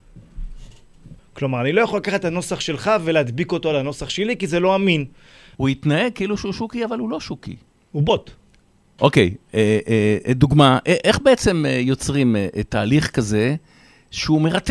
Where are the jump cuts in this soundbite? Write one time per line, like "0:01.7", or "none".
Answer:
0:01.2
0:05.5
0:09.0